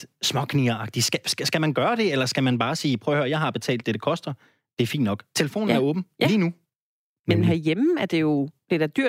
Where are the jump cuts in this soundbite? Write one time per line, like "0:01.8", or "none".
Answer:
0:07.1